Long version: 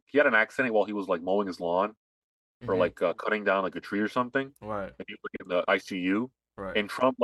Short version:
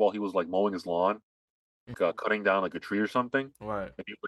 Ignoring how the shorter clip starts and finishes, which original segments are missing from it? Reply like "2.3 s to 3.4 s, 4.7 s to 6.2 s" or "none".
2.7 s to 2.9 s